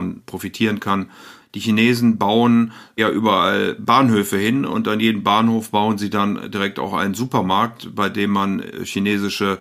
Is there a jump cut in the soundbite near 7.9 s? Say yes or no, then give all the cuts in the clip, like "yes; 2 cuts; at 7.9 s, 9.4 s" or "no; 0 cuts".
no; 1 cut; at 1.4 s